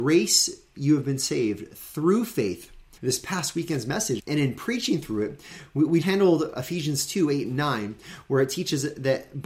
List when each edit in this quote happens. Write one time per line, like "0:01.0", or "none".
0:03.0
0:04.2
0:06.0